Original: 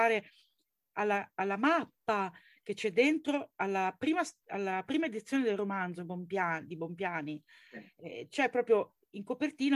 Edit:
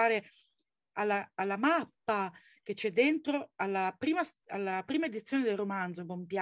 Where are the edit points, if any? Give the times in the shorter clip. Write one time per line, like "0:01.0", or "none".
none